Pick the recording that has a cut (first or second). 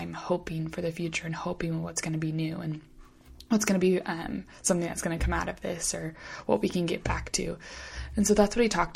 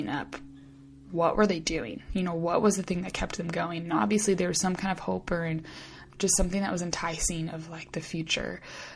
second